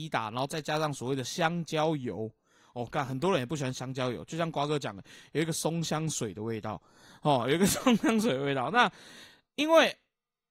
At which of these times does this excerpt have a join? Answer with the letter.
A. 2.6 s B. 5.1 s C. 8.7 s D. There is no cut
D